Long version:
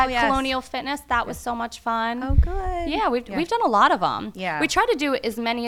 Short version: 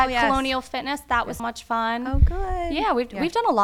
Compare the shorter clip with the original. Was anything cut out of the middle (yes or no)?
yes